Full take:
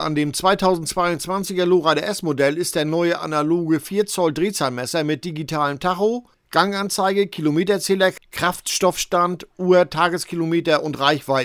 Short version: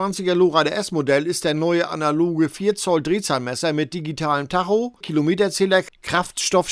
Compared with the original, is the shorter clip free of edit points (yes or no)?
no